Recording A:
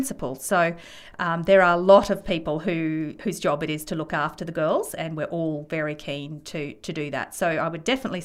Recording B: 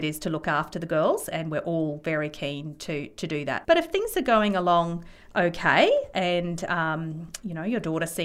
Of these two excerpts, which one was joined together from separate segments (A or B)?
B